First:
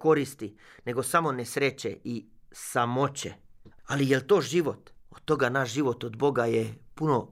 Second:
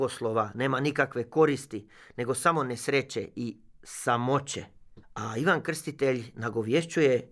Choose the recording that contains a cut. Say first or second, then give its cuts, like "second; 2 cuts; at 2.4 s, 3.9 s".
first; 2 cuts; at 3.8 s, 5.0 s